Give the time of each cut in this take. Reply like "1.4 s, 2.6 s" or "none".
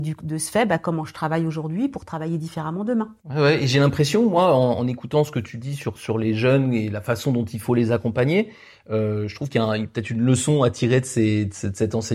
none